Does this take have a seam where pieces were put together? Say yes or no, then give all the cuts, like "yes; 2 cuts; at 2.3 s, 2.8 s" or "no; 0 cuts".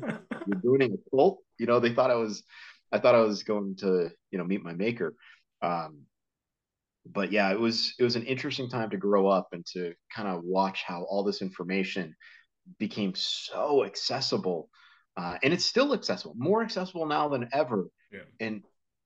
no; 0 cuts